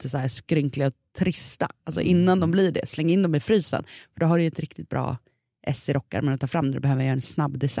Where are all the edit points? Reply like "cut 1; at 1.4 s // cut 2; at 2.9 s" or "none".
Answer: none